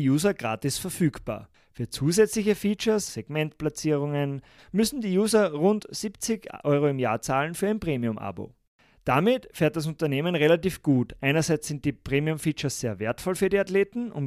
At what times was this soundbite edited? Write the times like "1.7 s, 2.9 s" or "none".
3.1 s, 4.6 s